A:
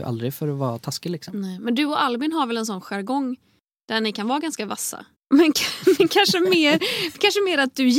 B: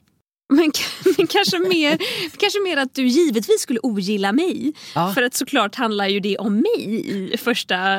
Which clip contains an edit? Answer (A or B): A